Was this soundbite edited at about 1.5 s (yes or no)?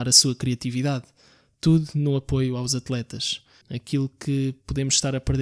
no